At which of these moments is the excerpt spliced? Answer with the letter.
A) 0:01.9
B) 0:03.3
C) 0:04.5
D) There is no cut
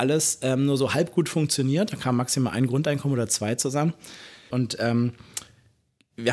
C